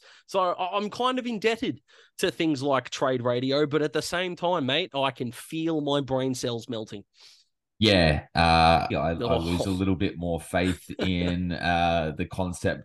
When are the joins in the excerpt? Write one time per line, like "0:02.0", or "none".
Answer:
0:08.9